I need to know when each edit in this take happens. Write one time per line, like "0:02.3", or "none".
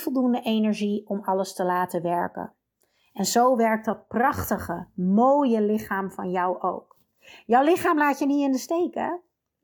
none